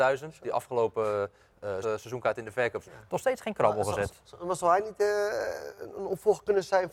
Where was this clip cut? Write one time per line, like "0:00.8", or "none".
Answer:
0:01.8
0:02.8